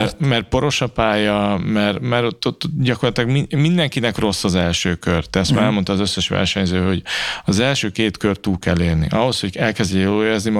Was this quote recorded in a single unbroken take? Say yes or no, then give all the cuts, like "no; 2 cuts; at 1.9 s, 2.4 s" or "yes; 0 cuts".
yes; 0 cuts